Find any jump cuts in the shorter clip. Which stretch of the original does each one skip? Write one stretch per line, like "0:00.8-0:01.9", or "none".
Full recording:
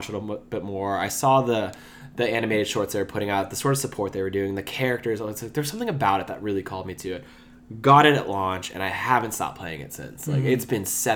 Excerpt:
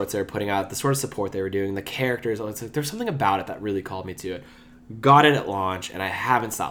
none